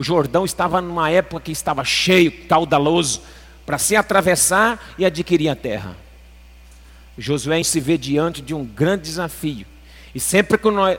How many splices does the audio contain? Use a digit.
1